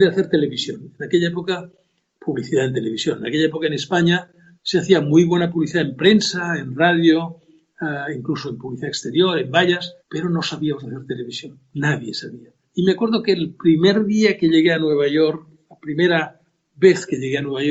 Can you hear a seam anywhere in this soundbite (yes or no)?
yes